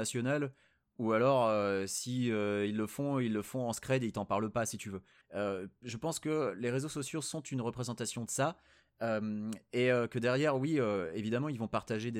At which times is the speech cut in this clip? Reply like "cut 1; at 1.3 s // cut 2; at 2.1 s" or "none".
cut 1; at 5.2 s